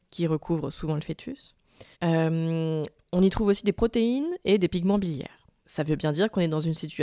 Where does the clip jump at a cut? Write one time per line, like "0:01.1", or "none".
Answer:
0:01.9
0:05.6